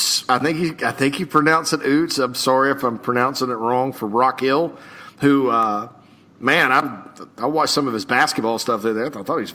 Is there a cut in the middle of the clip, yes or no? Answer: no